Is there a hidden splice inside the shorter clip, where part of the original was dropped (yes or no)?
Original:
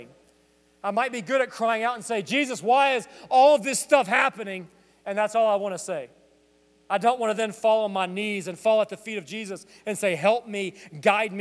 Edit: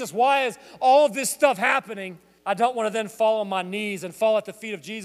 yes